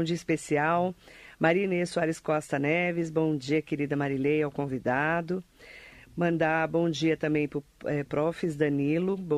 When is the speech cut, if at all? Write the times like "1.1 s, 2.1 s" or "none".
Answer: none